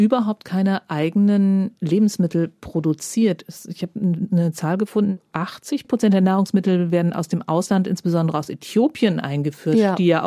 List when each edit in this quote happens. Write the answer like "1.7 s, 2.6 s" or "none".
none